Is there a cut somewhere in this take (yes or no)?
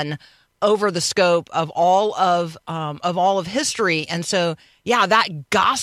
no